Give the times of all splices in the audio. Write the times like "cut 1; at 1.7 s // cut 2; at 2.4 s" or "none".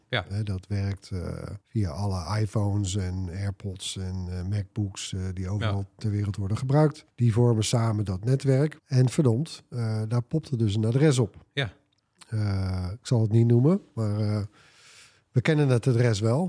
cut 1; at 1.6 s // cut 2; at 7.1 s // cut 3; at 8.8 s